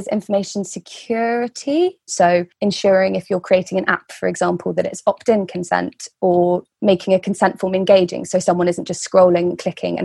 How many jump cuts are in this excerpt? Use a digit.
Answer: 1